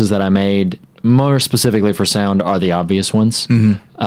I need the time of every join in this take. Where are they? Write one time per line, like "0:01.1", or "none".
none